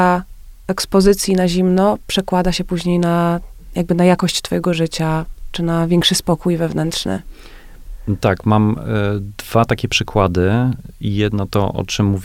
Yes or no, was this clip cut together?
no